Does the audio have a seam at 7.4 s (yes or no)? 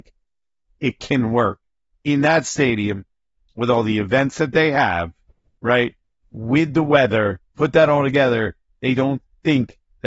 yes